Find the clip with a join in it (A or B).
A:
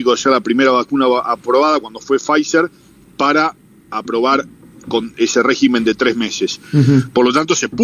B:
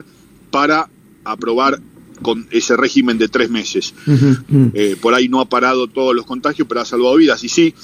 B